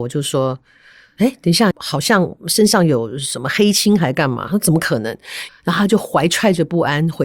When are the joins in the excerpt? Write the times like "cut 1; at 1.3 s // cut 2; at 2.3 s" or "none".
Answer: cut 1; at 1.7 s // cut 2; at 5.5 s